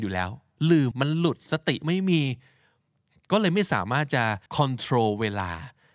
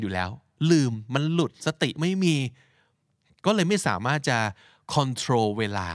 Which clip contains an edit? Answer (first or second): first